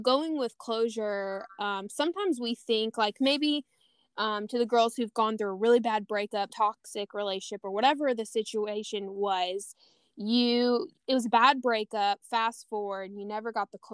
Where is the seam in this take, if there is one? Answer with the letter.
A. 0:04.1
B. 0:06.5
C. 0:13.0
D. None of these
B